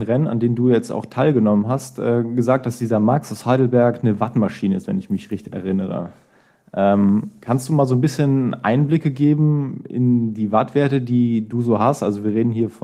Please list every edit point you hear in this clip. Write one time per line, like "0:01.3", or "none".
none